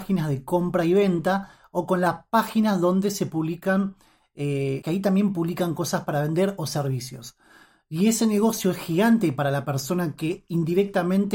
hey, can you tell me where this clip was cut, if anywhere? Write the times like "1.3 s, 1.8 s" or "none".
4.8 s